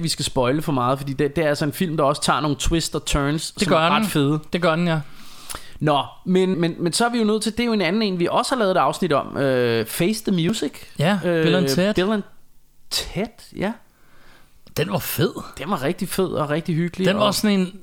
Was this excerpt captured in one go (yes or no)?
no